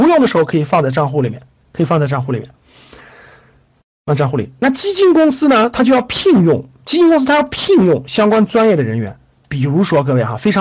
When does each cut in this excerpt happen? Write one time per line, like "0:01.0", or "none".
none